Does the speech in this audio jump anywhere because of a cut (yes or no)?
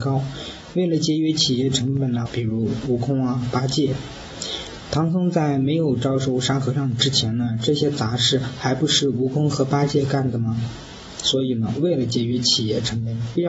yes